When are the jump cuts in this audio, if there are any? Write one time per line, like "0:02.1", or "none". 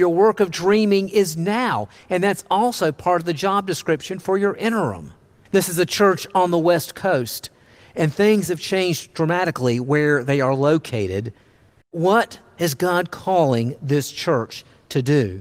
0:05.5
0:11.8